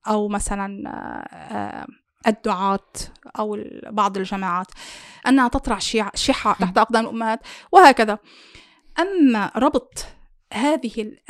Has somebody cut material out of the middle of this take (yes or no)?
yes